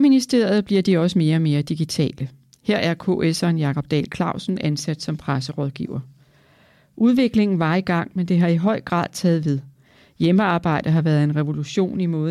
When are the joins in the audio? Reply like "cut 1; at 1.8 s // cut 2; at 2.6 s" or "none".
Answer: none

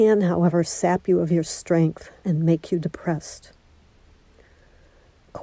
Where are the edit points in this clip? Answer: cut 1; at 2.2 s

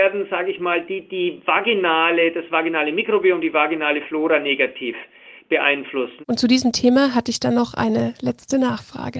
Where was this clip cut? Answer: cut 1; at 6.2 s

